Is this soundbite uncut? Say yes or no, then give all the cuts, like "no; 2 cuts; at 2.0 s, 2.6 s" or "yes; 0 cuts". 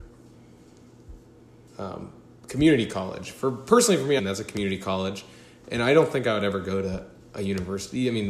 no; 1 cut; at 4.2 s